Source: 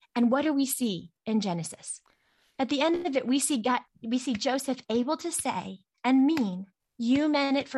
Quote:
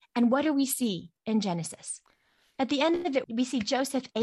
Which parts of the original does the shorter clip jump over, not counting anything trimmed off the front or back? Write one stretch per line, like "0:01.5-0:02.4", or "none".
0:03.2-0:04.0